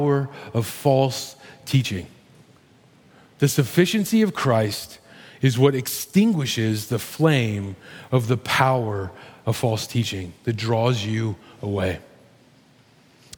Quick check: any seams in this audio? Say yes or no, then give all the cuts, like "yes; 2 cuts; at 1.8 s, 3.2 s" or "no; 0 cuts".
no; 0 cuts